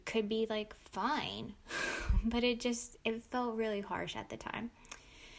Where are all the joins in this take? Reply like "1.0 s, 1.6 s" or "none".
none